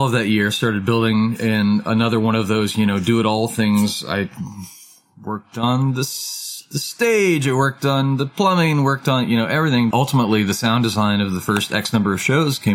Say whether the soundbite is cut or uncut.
cut